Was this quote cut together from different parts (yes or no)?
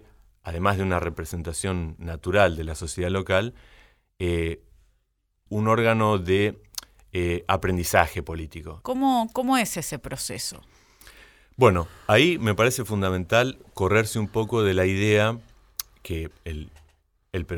yes